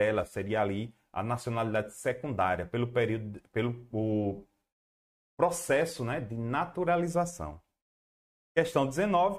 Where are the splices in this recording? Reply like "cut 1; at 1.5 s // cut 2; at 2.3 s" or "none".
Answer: none

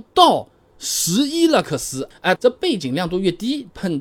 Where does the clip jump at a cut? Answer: cut 1; at 2.4 s

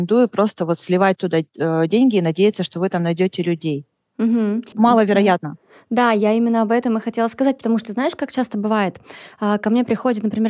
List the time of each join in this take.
cut 1; at 4.7 s

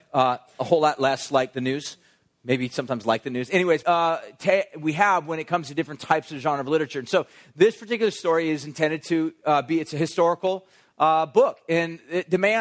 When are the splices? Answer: cut 1; at 3.8 s

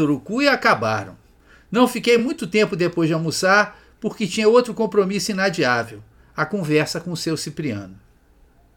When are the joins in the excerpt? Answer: none

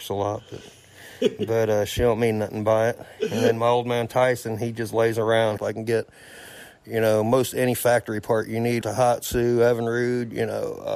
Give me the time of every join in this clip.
cut 1; at 5.6 s // cut 2; at 8.8 s

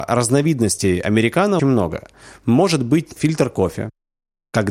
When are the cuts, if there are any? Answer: cut 1; at 1.6 s // cut 2; at 3.2 s

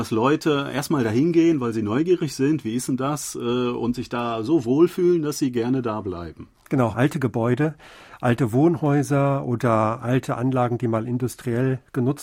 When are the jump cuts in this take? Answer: cut 1; at 6.9 s

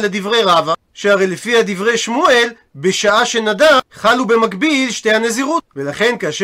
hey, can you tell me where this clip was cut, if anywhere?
none

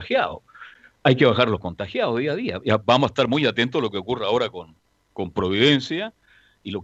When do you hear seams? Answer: none

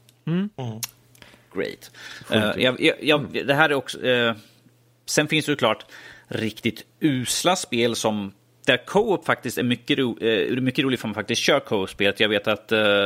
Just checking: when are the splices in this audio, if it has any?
none

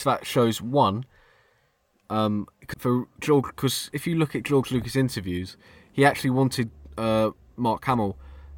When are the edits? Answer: cut 1; at 2.7 s

